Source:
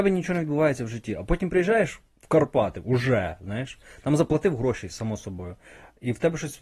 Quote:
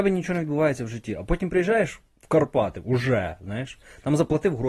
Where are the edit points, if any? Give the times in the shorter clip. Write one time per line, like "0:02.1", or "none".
none